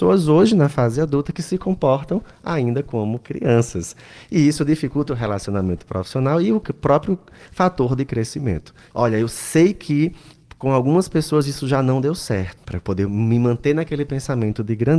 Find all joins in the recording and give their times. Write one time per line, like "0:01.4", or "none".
0:05.1
0:08.9
0:12.6